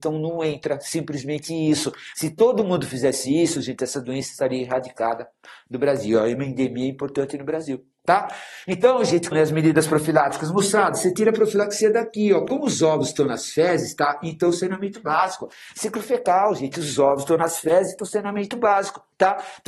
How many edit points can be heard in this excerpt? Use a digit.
1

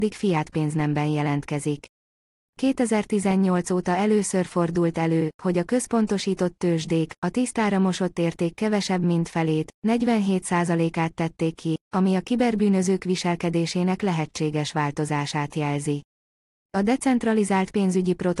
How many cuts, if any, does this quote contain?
0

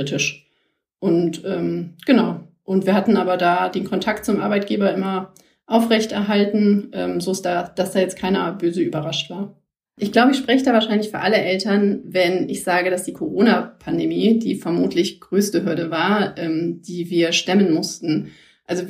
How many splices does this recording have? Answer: 1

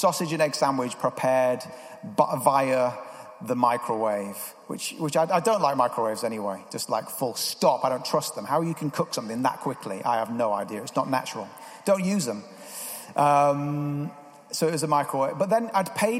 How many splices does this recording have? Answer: 0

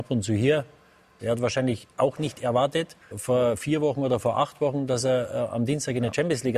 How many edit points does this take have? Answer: 2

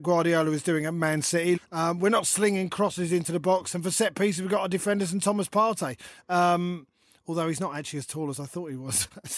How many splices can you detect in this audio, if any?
1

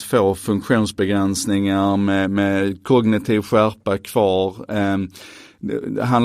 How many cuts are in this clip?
0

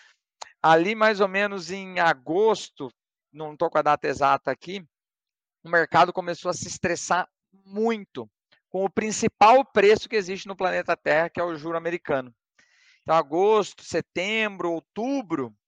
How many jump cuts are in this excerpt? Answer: 0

